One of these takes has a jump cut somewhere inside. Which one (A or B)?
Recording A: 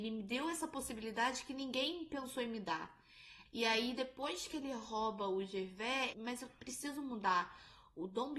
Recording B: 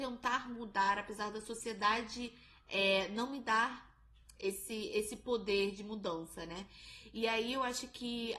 A